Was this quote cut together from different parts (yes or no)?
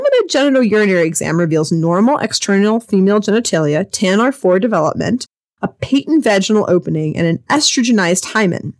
no